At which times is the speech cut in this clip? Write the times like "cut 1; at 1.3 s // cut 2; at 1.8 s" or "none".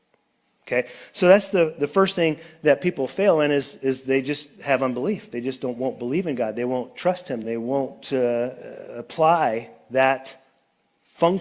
cut 1; at 7.4 s